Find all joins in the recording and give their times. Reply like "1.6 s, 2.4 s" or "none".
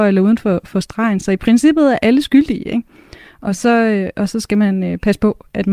none

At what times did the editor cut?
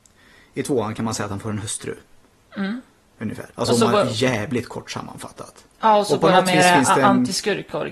3.5 s

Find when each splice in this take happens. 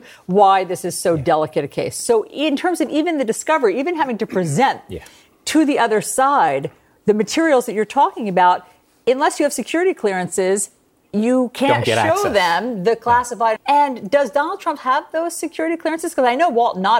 13.6 s, 14.8 s

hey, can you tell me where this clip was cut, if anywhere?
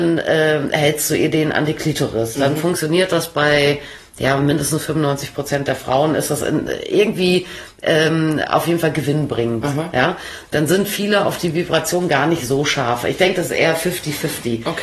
10.4 s

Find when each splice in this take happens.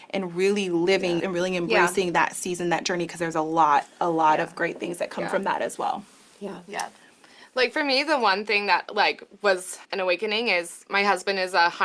1.2 s, 9.8 s

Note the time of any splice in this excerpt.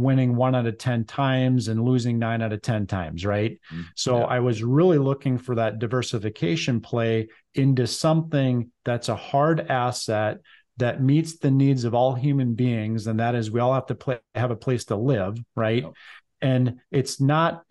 none

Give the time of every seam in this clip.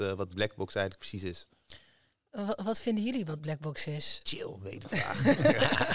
none

